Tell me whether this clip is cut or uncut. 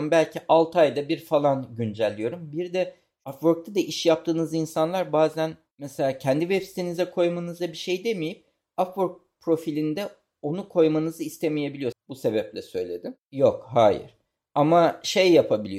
cut